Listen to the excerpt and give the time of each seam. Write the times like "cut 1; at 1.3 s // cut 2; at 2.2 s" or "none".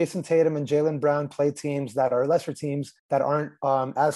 cut 1; at 3.0 s